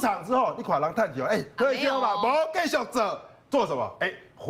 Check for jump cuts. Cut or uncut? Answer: cut